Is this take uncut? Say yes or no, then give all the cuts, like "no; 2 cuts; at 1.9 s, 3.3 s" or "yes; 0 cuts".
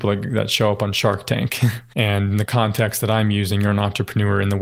no; 1 cut; at 1.9 s